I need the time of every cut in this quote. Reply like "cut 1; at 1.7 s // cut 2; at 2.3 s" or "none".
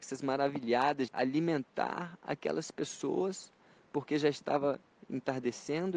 cut 1; at 1.1 s

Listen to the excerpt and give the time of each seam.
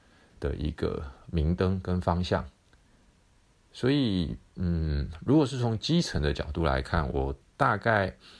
none

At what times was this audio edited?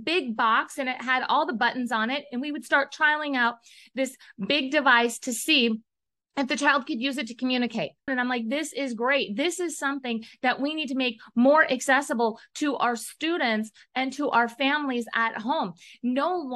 cut 1; at 8.1 s

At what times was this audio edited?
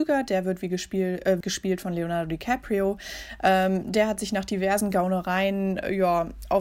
cut 1; at 1.4 s

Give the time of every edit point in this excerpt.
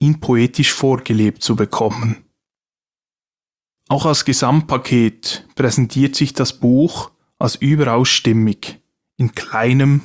none

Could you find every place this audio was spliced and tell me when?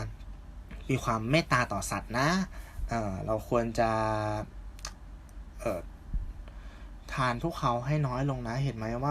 none

